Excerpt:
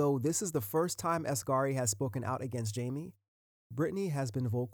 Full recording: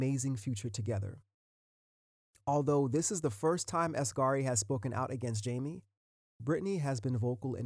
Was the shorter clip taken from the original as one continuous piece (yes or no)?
yes